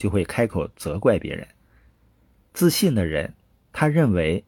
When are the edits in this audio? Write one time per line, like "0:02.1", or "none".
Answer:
none